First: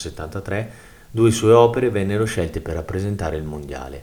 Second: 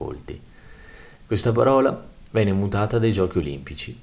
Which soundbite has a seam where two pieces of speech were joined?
second; 1 cut; at 1.2 s

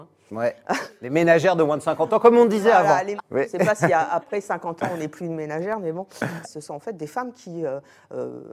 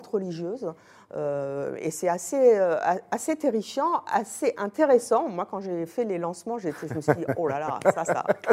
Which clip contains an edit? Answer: first; 2 cuts; at 3.2 s, 6.4 s

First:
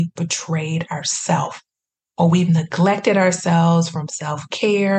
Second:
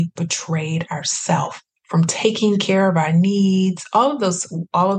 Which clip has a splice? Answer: second; 1 cut; at 1.8 s

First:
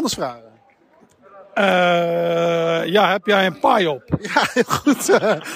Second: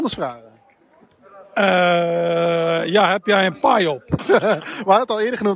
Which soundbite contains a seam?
second; 1 cut; at 4.2 s

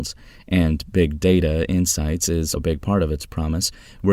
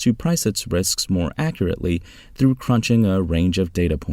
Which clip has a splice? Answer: first; 1 cut; at 2.6 s

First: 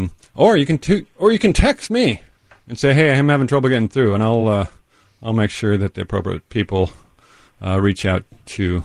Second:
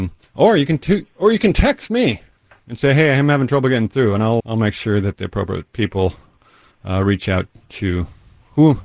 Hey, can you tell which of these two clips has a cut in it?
second; 1 cut; at 4.4 s

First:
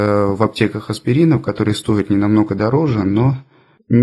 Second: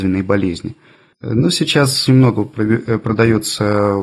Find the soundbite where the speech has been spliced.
second; 1 cut; at 2.1 s

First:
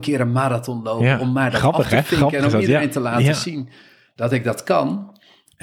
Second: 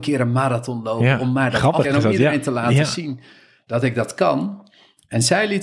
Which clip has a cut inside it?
second; 1 cut; at 1.8 s

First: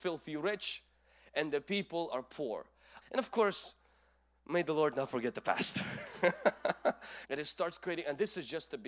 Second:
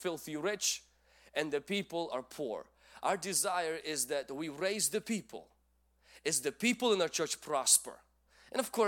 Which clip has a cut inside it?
first; 2 cuts; at 3.0 s, 7.2 s

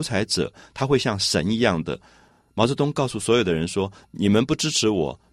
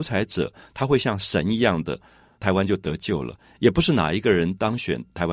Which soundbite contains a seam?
second; 1 cut; at 2.3 s

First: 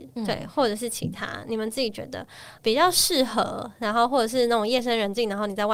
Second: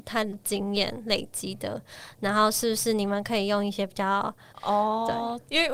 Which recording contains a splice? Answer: second; 1 cut; at 4.5 s

